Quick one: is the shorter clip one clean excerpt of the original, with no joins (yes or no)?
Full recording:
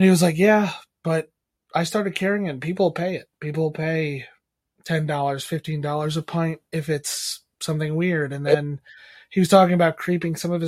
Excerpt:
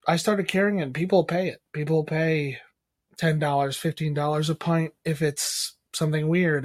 yes